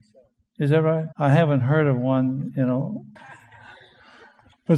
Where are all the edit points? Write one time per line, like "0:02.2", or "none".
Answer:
0:01.1
0:03.2